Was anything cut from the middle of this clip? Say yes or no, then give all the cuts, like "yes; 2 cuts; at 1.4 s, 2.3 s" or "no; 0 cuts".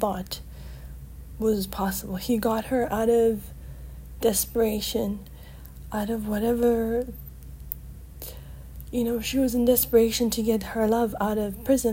no; 0 cuts